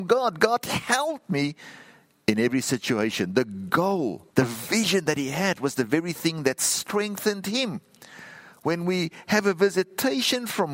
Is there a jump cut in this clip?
yes; 1 cut; at 4.3 s

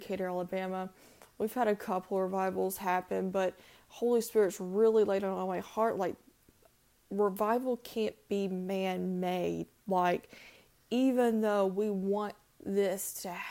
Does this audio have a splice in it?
no; 0 cuts

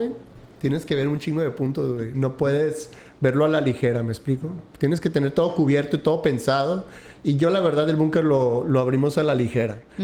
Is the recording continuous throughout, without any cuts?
yes; 0 cuts

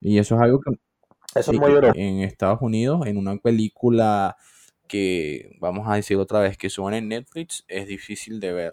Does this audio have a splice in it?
yes; 1 cut; at 1.9 s

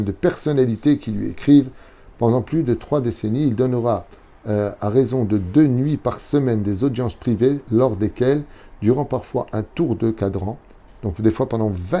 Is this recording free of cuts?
yes; 0 cuts

